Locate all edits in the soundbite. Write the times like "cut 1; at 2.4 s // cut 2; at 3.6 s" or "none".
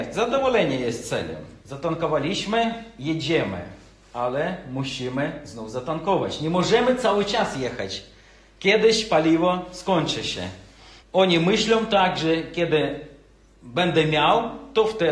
cut 1; at 1.6 s // cut 2; at 11.0 s